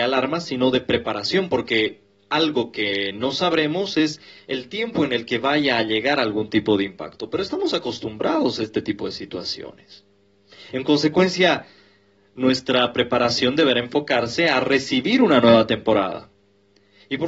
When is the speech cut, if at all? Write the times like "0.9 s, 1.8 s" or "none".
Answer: none